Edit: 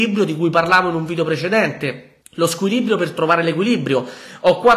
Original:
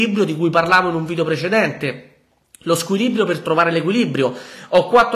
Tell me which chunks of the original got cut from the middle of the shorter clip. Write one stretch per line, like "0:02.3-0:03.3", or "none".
0:02.2-0:02.5